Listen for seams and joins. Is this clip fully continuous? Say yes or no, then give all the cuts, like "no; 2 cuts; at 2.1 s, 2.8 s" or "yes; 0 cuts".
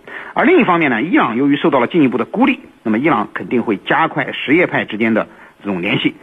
yes; 0 cuts